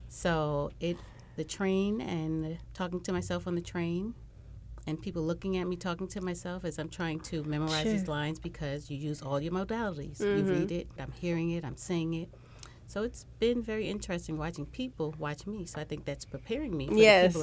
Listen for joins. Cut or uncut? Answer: cut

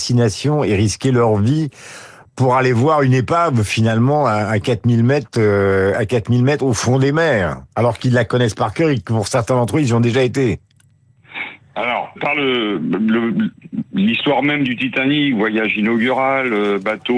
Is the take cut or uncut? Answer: cut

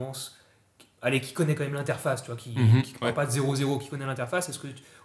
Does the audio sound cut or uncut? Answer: uncut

